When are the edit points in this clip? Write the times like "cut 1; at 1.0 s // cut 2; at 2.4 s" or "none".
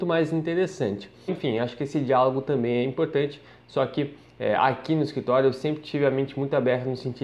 cut 1; at 1.3 s